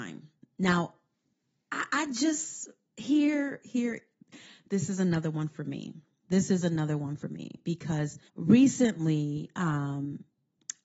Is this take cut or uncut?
cut